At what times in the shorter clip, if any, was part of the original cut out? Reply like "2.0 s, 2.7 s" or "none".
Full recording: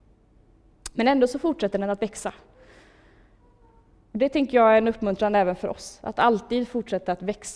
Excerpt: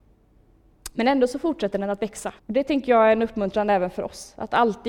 2.4 s